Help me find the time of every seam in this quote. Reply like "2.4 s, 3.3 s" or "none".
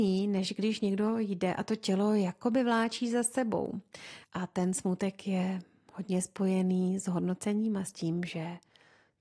4.2 s